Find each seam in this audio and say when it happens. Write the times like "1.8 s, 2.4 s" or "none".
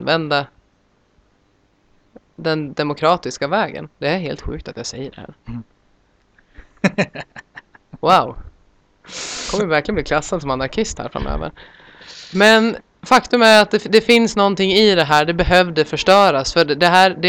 none